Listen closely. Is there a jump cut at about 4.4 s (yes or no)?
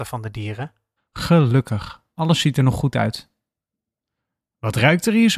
no